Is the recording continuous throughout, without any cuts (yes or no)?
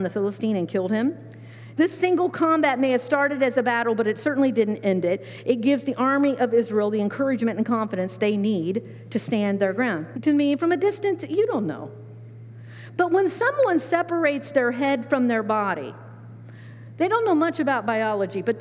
no